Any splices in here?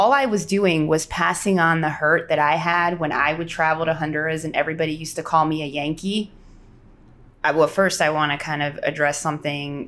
yes; 1 cut; at 7.3 s

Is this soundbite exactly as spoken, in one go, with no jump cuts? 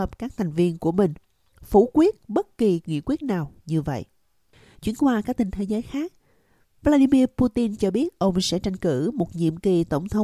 yes; 0 cuts

